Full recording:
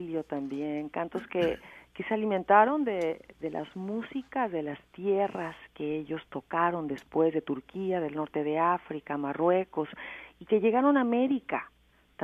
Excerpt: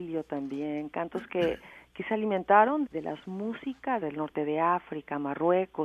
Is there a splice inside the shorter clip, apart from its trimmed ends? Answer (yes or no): yes